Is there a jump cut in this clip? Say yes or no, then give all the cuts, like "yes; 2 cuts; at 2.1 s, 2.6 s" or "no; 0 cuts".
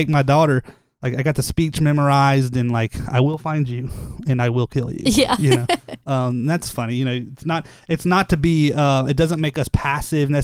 no; 0 cuts